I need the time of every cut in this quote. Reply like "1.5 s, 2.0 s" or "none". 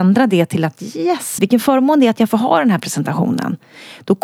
1.4 s